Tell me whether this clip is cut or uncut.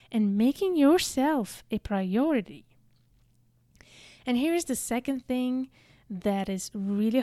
uncut